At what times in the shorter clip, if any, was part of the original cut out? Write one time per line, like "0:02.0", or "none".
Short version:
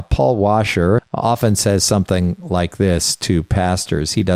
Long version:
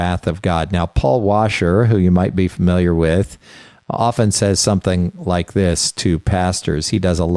0:01.0